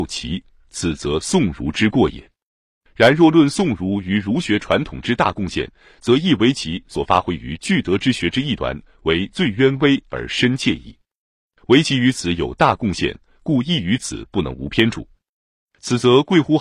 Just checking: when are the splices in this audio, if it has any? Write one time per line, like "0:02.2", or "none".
none